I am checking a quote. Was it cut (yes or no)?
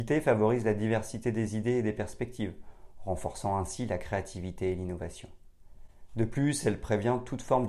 no